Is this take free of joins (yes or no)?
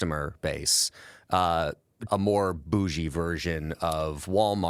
no